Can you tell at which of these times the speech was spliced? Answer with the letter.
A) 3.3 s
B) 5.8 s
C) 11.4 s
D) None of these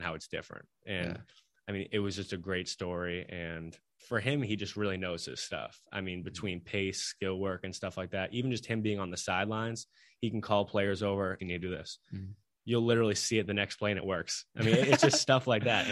C